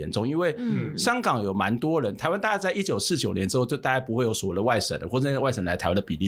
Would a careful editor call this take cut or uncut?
uncut